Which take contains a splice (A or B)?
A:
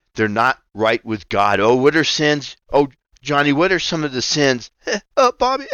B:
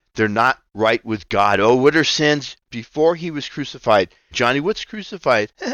B